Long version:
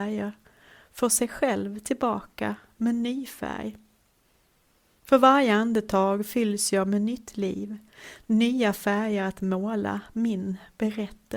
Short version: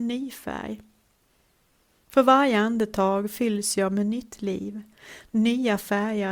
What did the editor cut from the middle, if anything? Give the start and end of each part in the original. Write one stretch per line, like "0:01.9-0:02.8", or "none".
none